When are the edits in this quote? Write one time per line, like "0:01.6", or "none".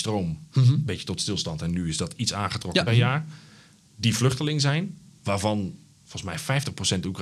0:02.9